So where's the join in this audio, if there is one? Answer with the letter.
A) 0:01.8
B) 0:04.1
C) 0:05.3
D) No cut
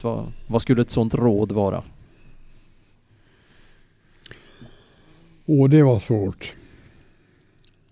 D